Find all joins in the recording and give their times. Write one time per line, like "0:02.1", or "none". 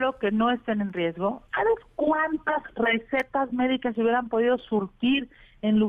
0:01.5